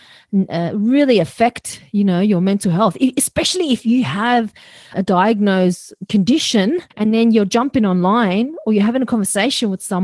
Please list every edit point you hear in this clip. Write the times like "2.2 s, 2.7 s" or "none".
4.9 s, 6.9 s